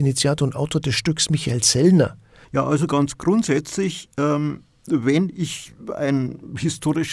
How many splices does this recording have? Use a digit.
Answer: 1